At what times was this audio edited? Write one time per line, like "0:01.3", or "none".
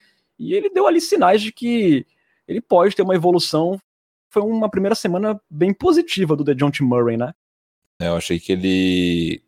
0:08.0